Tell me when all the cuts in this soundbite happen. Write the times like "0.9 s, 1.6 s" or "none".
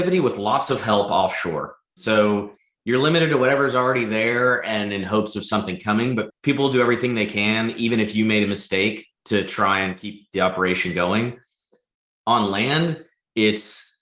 none